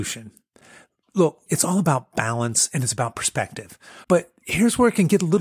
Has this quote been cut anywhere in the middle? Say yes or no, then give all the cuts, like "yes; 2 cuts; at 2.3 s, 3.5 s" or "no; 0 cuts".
yes; 2 cuts; at 1.5 s, 4.0 s